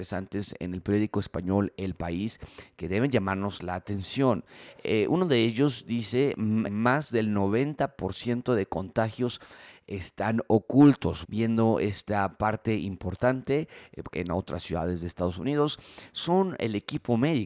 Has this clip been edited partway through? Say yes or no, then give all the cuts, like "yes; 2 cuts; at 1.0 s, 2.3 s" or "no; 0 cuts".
yes; 3 cuts; at 6.6 s, 11.2 s, 14.1 s